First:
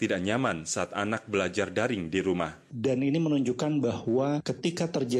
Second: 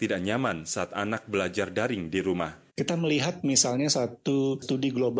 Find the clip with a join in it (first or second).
first